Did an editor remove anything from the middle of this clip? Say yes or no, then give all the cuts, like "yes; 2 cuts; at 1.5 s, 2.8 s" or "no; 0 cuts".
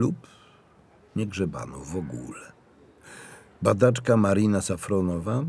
no; 0 cuts